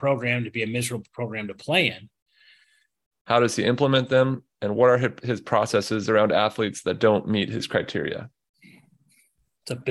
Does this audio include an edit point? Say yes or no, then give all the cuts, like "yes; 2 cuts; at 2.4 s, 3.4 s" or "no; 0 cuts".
yes; 1 cut; at 3.1 s